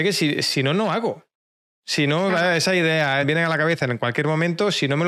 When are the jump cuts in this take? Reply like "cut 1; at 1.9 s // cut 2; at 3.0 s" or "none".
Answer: cut 1; at 3.2 s